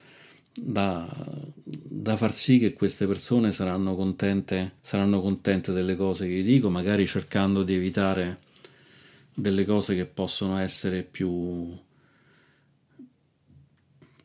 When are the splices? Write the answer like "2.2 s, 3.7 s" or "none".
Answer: 4.8 s